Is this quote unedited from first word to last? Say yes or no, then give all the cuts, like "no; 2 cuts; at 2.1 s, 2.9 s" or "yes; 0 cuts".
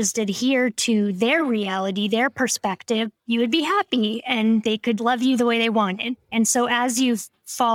no; 3 cuts; at 3.2 s, 5.0 s, 6.3 s